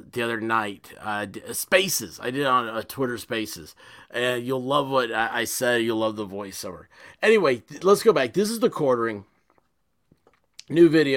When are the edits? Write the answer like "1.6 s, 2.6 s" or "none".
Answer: none

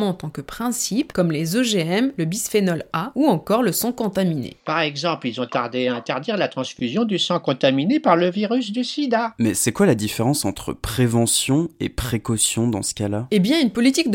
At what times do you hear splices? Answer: none

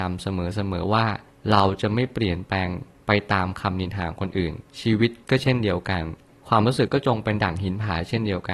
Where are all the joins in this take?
6.9 s

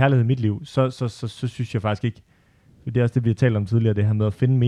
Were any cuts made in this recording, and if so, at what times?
none

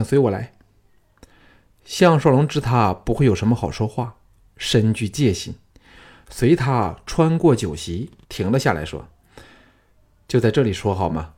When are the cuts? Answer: 8.2 s

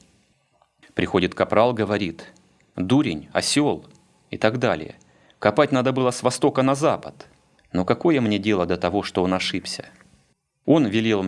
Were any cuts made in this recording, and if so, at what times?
7.6 s

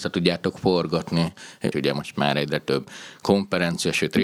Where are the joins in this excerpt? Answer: 1.7 s

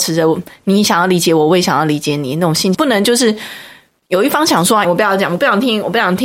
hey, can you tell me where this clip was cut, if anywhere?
2.7 s, 4.8 s

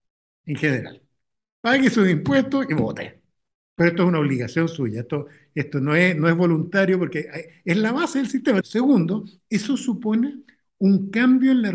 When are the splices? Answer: 8.6 s

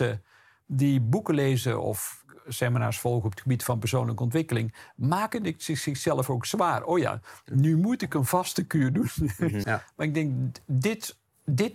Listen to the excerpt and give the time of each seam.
9.6 s

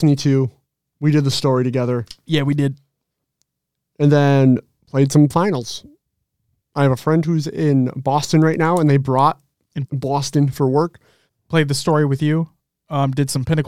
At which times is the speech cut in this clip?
9.9 s, 11.3 s

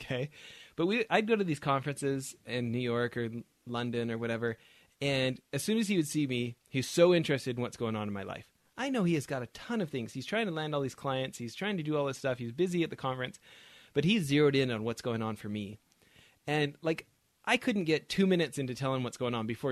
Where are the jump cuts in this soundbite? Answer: none

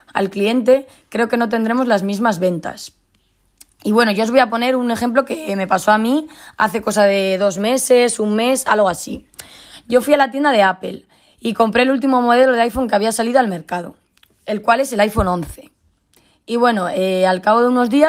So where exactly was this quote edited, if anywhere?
none

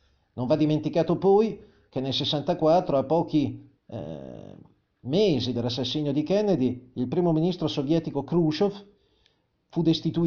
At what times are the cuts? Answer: 3.8 s

